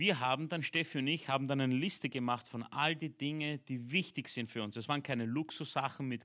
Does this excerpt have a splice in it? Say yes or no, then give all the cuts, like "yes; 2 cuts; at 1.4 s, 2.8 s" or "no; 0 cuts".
no; 0 cuts